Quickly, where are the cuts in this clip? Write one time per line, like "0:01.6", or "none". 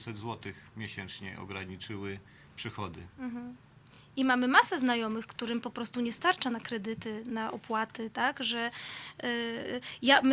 none